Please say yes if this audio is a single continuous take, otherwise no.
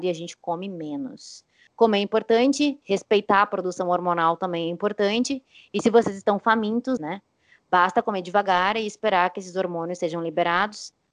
no